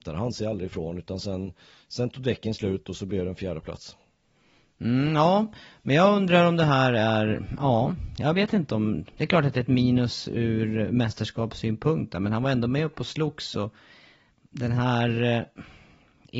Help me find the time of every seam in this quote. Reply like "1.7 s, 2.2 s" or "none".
none